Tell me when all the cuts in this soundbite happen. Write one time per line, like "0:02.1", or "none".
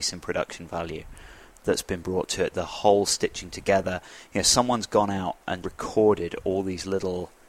0:05.6

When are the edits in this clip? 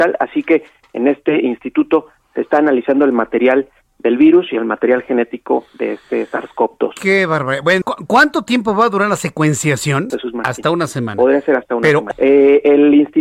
0:07.8
0:10.1
0:12.1

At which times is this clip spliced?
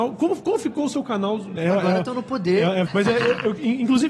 0:01.6
0:02.9

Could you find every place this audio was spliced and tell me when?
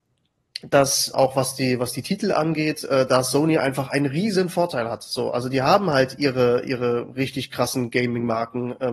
0:01.1

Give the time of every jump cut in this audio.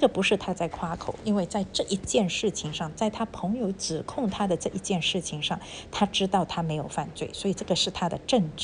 none

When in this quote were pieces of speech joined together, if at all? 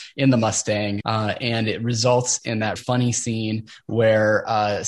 0:01.0
0:02.8

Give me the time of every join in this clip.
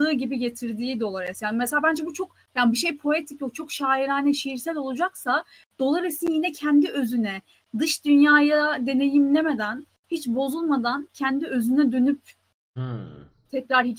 none

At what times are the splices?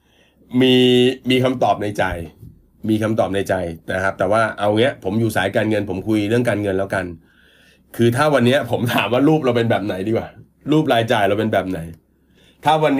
none

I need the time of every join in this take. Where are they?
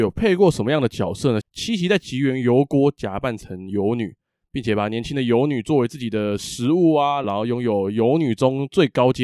0:01.4
0:07.2

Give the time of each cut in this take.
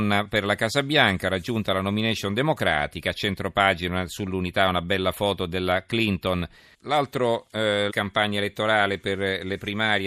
0:06.7
0:07.9

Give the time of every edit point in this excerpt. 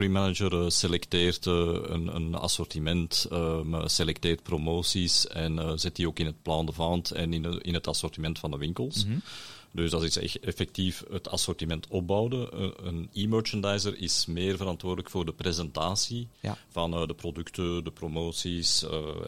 none

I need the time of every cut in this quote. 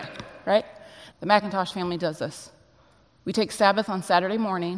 0:01.1

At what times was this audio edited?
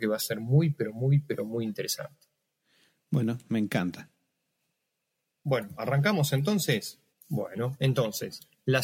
0:07.1

